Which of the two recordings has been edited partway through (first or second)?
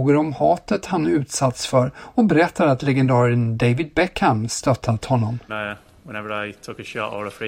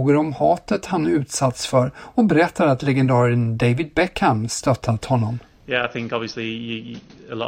first